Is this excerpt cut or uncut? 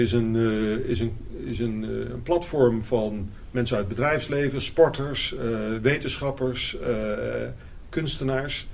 uncut